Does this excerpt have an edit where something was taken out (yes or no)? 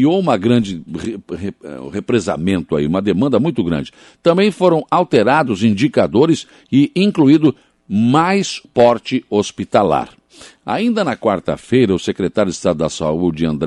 yes